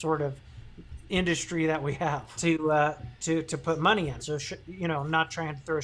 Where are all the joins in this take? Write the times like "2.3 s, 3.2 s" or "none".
2.4 s, 4.2 s